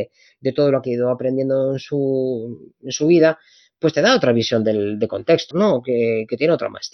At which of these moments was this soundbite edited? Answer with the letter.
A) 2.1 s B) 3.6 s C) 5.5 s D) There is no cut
C